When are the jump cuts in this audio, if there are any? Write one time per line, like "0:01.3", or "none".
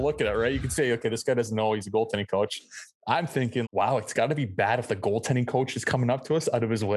0:03.6